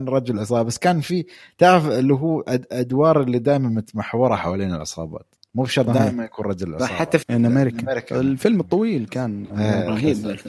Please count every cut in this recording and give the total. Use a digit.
1